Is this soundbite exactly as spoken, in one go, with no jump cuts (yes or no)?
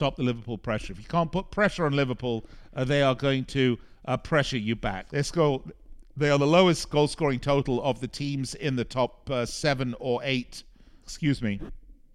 no